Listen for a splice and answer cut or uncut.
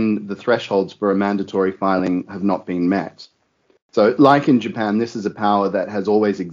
uncut